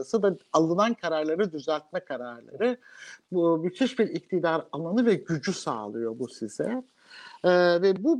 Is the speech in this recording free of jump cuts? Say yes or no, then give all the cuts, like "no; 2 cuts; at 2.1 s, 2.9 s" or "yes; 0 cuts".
no; 1 cut; at 3.2 s